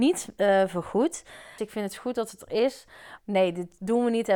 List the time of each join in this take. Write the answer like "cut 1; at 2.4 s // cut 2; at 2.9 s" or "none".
cut 1; at 1.6 s // cut 2; at 3.2 s